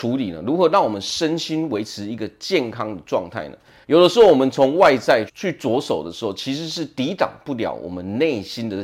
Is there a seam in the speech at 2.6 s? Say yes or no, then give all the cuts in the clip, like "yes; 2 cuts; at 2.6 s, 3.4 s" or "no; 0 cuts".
no; 2 cuts; at 3.8 s, 5.3 s